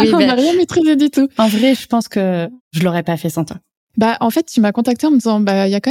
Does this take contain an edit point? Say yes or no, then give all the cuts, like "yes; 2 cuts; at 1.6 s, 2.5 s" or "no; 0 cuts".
no; 0 cuts